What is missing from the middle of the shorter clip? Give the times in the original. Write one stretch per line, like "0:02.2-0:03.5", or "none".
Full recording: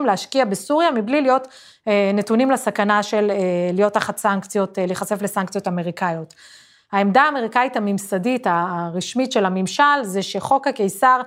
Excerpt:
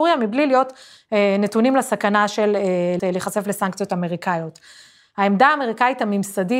0:03.7-0:04.7